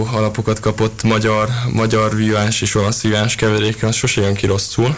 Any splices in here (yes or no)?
no